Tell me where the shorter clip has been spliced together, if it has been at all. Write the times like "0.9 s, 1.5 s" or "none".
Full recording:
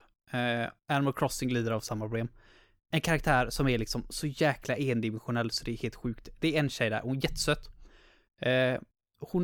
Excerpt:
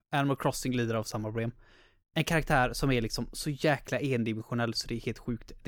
none